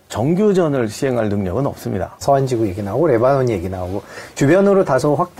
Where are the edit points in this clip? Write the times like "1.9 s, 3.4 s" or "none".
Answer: 2.2 s